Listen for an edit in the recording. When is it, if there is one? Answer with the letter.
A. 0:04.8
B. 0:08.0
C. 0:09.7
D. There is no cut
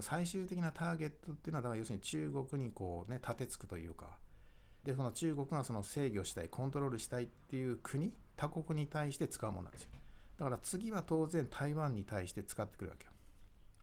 A